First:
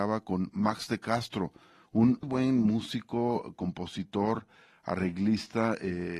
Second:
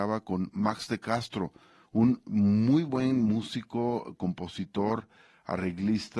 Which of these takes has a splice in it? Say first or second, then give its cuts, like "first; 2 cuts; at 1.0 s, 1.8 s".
first; 1 cut; at 2.2 s